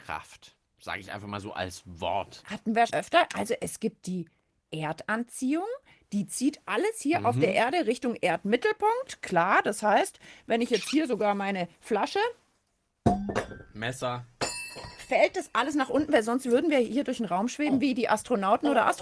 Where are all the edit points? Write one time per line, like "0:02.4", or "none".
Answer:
0:02.9